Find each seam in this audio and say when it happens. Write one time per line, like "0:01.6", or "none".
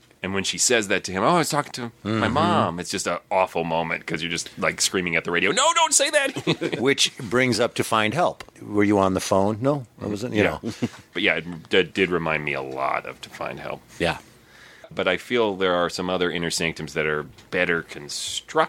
0:14.9